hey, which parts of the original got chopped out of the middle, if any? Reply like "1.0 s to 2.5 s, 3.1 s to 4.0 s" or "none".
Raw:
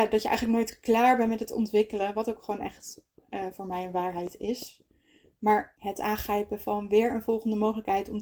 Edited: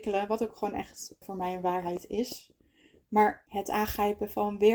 3.1 s to 3.5 s